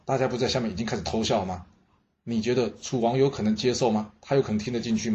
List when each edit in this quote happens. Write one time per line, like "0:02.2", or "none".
none